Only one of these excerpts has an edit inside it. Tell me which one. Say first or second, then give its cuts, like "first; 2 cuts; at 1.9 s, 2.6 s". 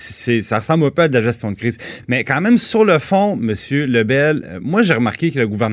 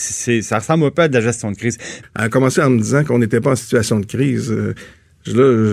second; 1 cut; at 2.0 s